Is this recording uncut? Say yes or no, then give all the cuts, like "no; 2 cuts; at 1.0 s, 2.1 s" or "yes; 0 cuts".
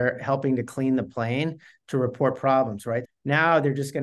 no; 1 cut; at 3.1 s